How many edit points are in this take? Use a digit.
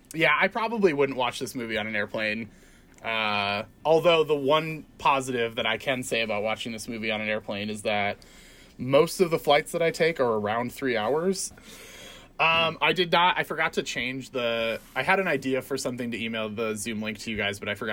1